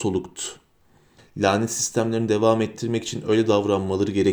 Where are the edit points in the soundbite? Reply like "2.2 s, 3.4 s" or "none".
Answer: 1.2 s

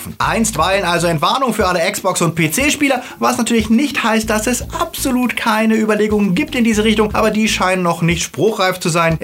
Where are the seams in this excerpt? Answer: none

